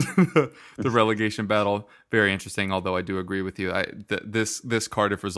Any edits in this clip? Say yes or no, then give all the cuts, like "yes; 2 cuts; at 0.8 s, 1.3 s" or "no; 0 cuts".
no; 0 cuts